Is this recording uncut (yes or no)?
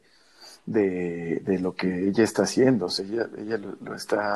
yes